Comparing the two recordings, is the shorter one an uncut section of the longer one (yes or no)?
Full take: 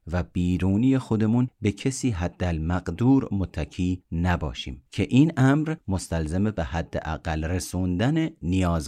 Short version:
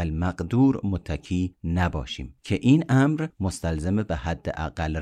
yes